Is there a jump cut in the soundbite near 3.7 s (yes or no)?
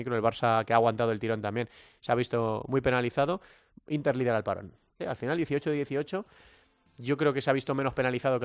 yes